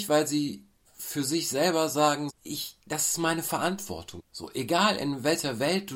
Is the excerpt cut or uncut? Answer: cut